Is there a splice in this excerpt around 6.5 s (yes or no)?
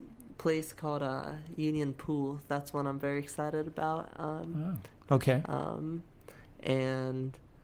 no